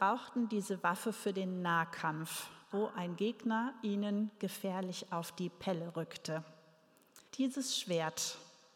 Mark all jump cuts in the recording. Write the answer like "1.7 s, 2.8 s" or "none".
2.7 s, 7.3 s